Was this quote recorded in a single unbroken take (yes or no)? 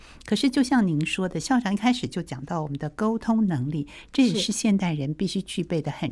yes